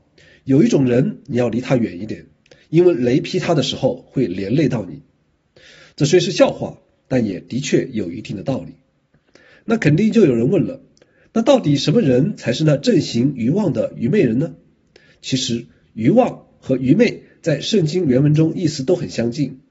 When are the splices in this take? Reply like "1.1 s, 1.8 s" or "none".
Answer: none

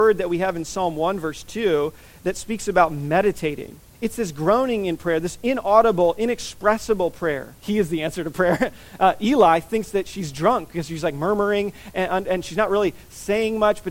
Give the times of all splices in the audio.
3.9 s, 7.6 s

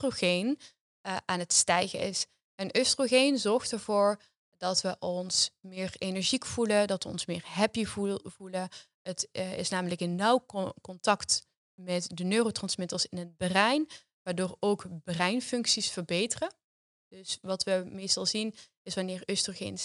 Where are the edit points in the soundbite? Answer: none

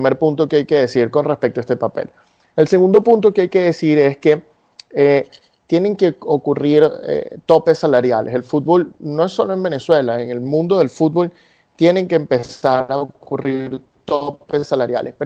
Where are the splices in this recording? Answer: none

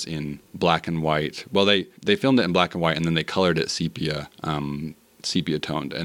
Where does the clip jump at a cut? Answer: 2.0 s

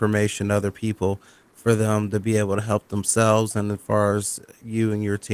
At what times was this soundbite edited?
none

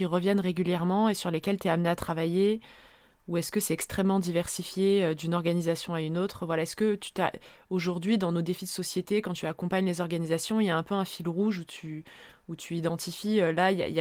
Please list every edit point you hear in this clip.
none

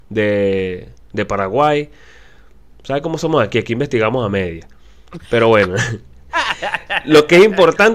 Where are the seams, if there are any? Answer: none

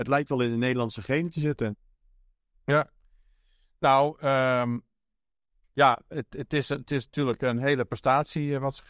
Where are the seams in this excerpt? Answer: none

